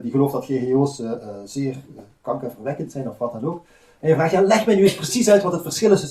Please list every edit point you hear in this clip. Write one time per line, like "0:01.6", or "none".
none